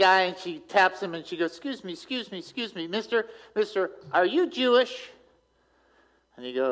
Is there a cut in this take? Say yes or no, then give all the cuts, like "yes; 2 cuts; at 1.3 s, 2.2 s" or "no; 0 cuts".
no; 0 cuts